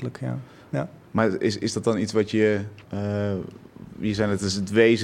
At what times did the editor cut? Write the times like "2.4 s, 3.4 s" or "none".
2.8 s, 3.9 s